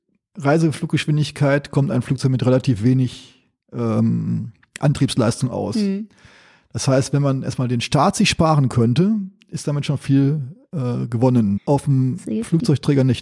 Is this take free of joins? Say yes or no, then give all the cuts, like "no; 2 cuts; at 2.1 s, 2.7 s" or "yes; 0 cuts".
no; 1 cut; at 11.6 s